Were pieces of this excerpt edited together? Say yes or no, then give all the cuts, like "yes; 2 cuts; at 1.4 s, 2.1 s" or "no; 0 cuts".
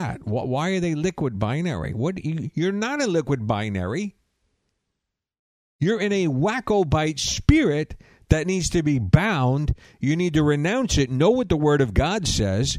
no; 0 cuts